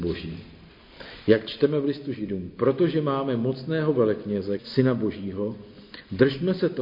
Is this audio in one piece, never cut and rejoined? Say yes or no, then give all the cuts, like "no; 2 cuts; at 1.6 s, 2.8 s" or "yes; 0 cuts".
no; 1 cut; at 4.6 s